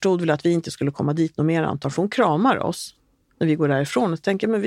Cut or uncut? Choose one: uncut